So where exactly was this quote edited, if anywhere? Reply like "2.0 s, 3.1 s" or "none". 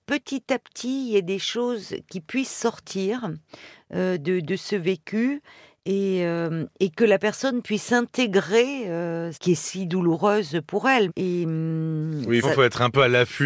9.3 s, 11.1 s, 12.4 s